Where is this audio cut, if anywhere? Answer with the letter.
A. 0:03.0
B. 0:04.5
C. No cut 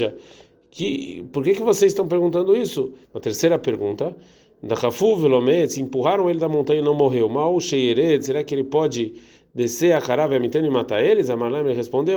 A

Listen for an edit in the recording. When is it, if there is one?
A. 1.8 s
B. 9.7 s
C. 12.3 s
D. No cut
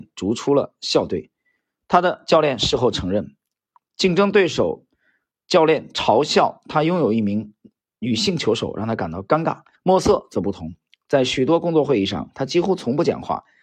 B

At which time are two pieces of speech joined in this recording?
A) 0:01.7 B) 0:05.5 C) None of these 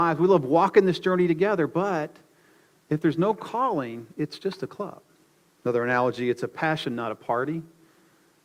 B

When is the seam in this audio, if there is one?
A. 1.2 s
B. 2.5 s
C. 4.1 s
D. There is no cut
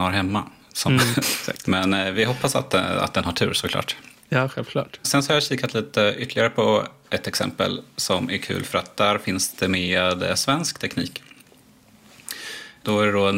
A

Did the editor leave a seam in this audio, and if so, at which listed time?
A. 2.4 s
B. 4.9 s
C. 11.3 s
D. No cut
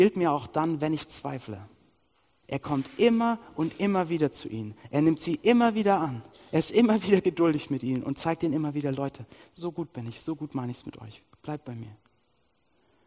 A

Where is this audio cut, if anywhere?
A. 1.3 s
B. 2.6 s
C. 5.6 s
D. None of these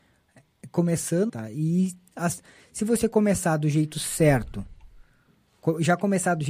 A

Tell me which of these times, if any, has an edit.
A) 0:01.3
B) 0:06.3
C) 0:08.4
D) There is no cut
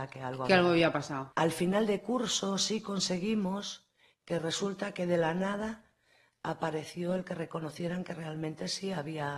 A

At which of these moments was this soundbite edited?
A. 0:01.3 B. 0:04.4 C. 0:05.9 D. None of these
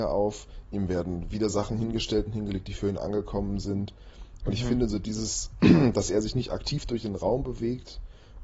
B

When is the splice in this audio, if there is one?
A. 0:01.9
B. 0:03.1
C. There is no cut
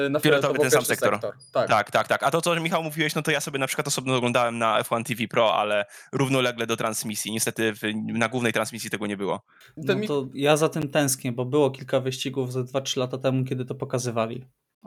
C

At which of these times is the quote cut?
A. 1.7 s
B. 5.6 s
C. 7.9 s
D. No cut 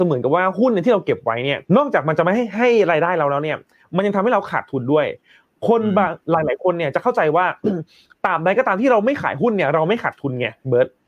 A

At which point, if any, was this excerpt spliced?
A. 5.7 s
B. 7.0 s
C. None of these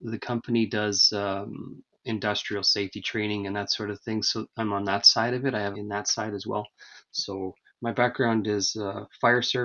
A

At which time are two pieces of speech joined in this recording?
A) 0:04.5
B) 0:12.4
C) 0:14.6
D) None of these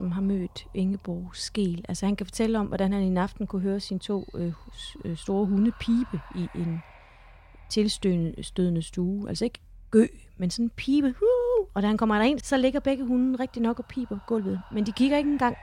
B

